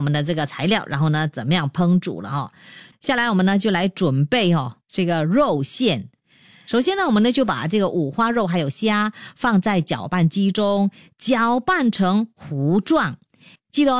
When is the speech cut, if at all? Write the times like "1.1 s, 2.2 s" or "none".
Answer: 2.9 s